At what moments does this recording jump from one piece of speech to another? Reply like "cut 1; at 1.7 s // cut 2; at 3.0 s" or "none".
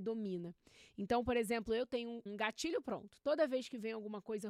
cut 1; at 2.3 s